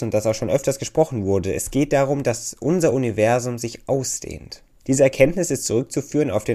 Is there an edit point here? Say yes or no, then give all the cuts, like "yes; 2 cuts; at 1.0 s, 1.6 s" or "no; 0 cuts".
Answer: yes; 1 cut; at 4.8 s